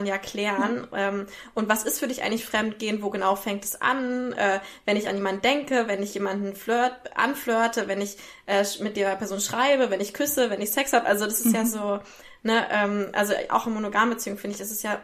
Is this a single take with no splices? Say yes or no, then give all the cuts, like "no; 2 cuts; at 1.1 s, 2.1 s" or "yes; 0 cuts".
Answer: yes; 0 cuts